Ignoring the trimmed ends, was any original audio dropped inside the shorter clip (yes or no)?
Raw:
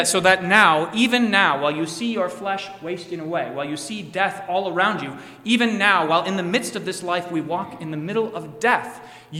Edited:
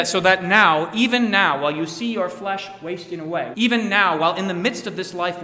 yes